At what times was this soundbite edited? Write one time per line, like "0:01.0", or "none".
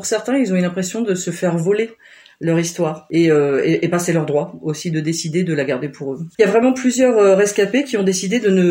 0:06.3